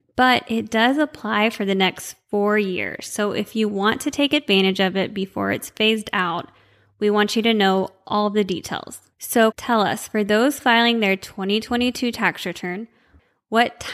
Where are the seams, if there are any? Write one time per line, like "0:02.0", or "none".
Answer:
0:09.5